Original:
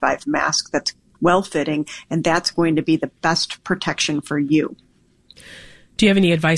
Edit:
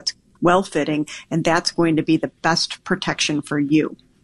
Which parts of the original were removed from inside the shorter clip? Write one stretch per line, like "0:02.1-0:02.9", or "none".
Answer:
none